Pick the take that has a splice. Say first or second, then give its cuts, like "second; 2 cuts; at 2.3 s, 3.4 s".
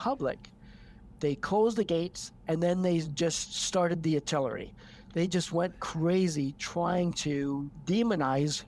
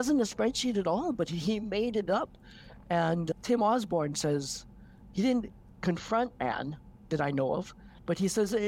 first; 1 cut; at 1.2 s